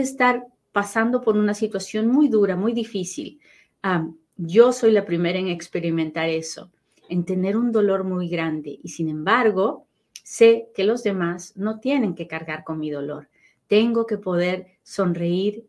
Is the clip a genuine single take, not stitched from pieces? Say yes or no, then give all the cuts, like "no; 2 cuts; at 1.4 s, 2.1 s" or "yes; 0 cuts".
yes; 0 cuts